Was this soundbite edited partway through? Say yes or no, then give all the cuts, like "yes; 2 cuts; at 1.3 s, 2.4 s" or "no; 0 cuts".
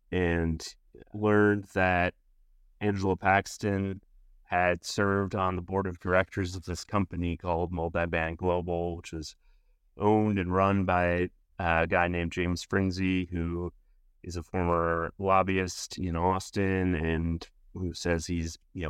no; 0 cuts